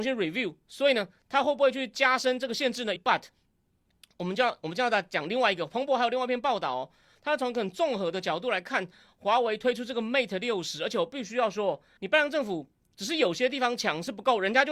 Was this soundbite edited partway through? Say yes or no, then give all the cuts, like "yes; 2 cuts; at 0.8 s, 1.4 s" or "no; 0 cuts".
yes; 2 cuts; at 3.0 s, 12.0 s